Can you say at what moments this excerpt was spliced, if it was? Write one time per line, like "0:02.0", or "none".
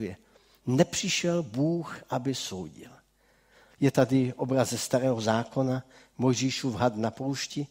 0:03.7